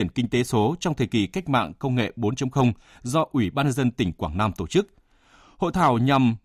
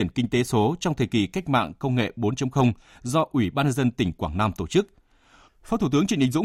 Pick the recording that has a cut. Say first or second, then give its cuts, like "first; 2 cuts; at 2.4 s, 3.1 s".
second; 1 cut; at 5.5 s